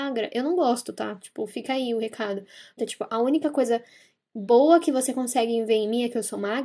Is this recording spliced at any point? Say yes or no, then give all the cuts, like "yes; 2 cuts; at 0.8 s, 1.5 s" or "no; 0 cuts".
yes; 1 cut; at 2.8 s